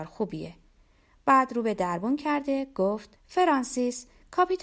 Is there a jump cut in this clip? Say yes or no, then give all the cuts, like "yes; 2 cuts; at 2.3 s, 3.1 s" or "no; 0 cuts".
yes; 1 cut; at 3.2 s